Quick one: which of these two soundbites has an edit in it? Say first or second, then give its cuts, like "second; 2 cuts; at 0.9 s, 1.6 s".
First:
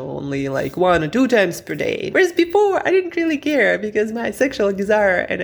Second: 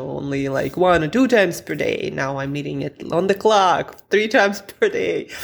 first; 1 cut; at 2.1 s